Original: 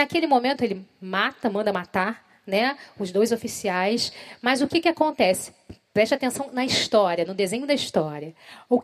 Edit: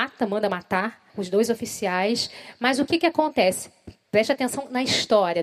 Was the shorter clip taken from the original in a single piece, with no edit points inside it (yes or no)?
no